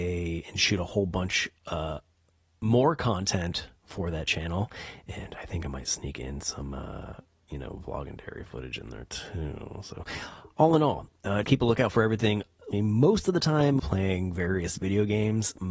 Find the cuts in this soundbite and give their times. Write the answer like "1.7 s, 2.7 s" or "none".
11.4 s, 12.7 s, 13.8 s